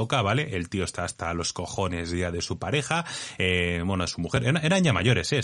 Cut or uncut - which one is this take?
uncut